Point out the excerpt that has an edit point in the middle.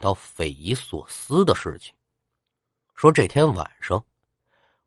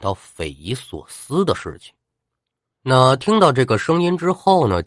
second; 1 cut; at 2.7 s

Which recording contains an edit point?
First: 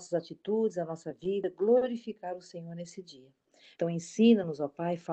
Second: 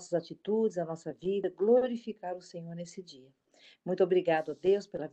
first; 1 cut; at 3.7 s

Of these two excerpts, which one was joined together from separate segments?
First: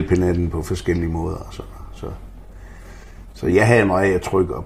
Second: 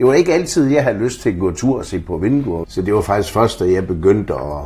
second; 1 cut; at 2.6 s

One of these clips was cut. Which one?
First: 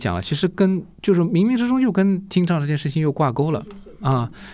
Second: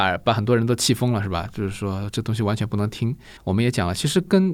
second; 1 cut; at 3.4 s

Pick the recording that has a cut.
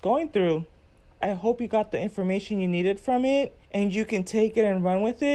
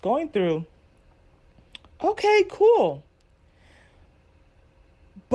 first; 2 cuts; at 1.2 s, 3.6 s

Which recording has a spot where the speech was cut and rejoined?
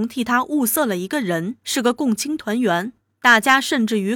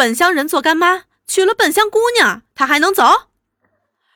first; 1 cut; at 1.6 s

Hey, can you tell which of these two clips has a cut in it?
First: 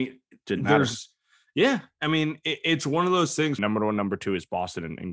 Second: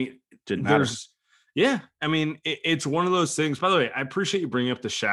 first; 1 cut; at 3.6 s

